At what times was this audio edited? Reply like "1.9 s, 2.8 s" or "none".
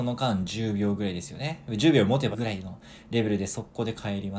2.3 s